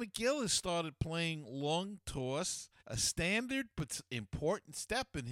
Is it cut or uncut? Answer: cut